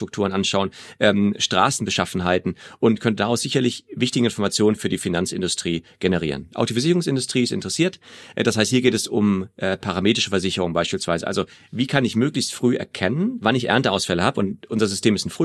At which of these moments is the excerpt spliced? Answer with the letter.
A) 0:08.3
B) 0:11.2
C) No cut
C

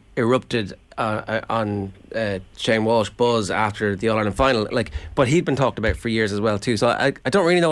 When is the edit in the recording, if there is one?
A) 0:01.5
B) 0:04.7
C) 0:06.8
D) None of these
D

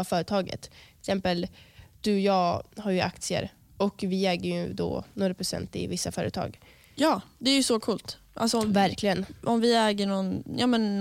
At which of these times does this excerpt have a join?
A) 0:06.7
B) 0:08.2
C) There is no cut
C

